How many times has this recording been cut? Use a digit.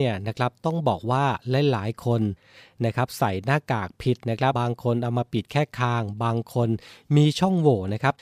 1